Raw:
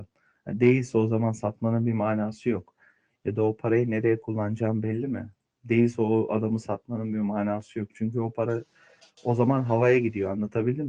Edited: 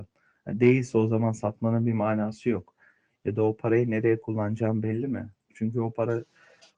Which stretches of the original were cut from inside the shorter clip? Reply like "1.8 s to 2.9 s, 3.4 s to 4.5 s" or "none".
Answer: 5.5 s to 7.9 s